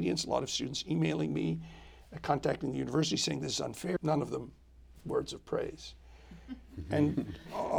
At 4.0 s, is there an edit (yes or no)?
yes